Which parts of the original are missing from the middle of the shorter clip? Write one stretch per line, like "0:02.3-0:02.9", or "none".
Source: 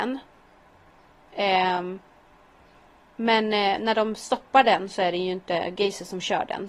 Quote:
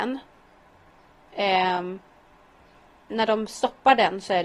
0:03.1-0:03.8